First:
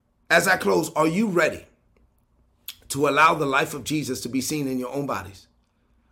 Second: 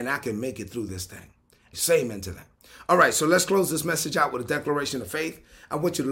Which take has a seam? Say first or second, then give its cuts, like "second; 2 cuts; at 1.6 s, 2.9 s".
second; 1 cut; at 1.7 s